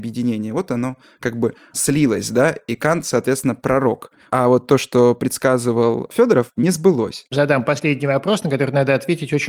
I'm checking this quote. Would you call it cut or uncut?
uncut